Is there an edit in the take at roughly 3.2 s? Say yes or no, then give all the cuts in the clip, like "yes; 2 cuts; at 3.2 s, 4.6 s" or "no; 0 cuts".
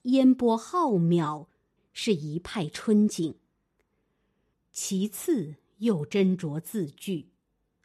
no; 2 cuts; at 1.8 s, 4.5 s